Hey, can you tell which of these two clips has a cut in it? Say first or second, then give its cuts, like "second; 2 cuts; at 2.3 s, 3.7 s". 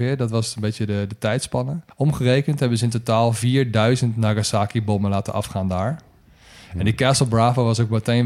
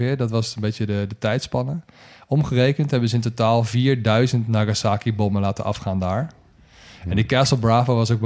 first; 1 cut; at 1.9 s